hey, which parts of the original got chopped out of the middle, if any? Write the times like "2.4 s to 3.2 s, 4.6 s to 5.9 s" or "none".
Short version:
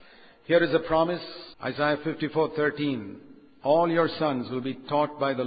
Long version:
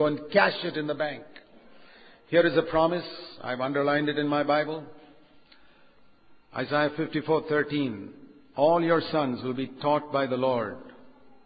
3.4 s to 6.5 s